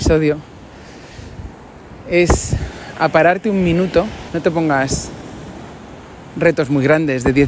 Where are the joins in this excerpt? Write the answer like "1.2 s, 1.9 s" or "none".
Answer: 4.3 s